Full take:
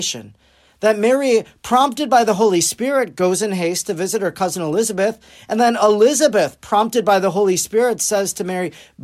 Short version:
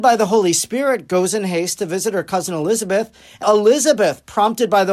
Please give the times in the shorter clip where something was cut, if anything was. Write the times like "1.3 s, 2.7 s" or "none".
3.4 s